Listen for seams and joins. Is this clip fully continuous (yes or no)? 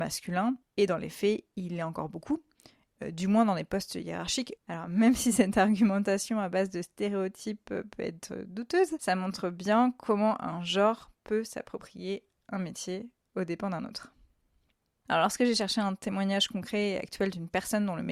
no